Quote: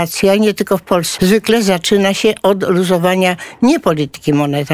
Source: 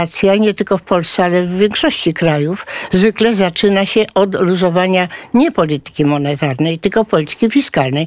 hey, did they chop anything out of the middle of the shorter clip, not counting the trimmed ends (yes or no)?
yes